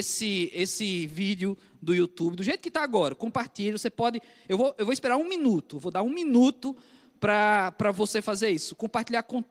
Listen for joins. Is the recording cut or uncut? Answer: uncut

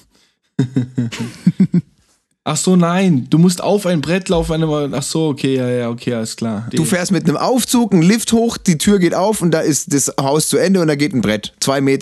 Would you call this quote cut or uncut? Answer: cut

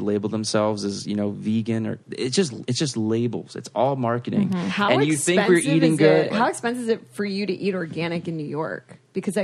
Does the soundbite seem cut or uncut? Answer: cut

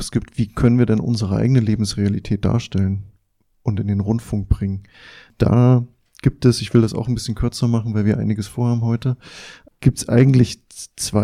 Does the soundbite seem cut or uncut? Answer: uncut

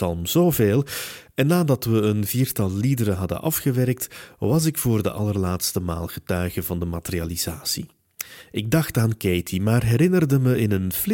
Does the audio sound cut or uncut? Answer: uncut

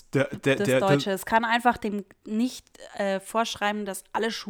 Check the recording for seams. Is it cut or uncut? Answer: uncut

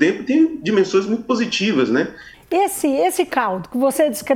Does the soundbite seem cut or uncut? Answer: cut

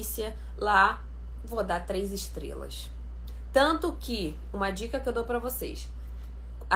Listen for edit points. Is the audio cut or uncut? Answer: uncut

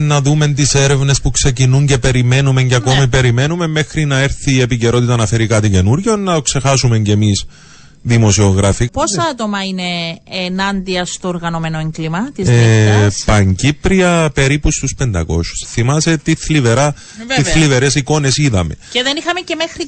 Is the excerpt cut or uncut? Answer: cut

